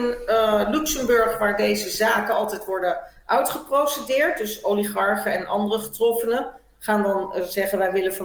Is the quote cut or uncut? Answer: uncut